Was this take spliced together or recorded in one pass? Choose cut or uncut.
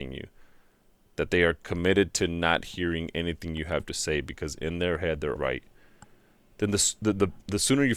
cut